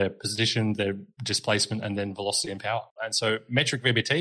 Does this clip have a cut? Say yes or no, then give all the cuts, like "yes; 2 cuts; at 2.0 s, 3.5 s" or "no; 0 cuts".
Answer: yes; 1 cut; at 3.0 s